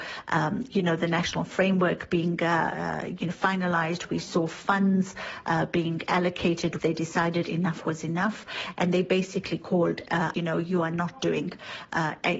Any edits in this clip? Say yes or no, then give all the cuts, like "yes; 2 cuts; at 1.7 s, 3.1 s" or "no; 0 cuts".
yes; 2 cuts; at 6.8 s, 10.3 s